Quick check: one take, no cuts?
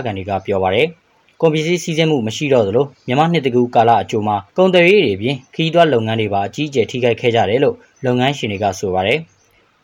no; 1 cut; at 4.5 s

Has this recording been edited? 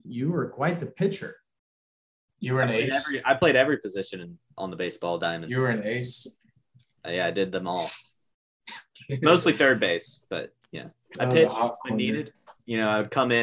no; 0 cuts

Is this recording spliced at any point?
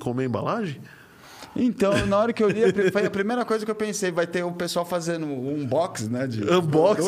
no; 0 cuts

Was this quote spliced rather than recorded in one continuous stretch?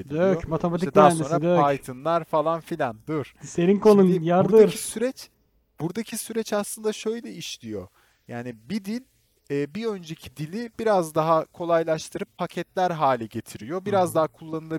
no; 0 cuts

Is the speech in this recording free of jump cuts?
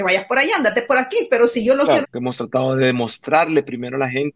no; 1 cut; at 2.0 s

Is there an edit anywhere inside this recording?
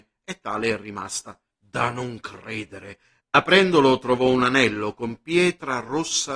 yes; 2 cuts; at 1.5 s, 3.2 s

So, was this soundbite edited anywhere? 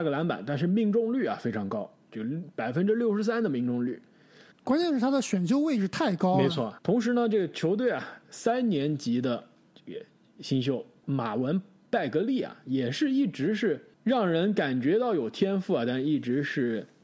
yes; 2 cuts; at 4.5 s, 6.8 s

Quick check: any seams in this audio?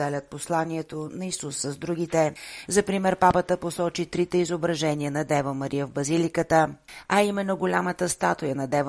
yes; 1 cut; at 2.7 s

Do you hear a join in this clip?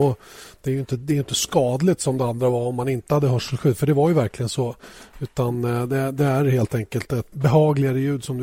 yes; 1 cut; at 7.3 s

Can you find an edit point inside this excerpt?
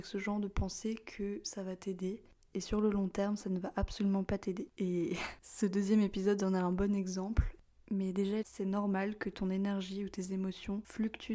yes; 2 cuts; at 4.7 s, 8.4 s

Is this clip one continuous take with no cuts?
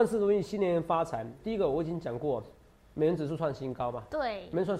no; 1 cut; at 1.4 s

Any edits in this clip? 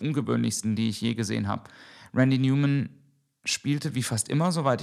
no; 0 cuts

